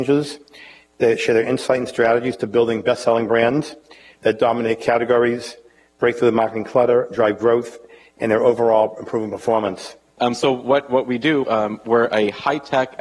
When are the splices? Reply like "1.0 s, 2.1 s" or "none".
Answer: 10.2 s, 11.5 s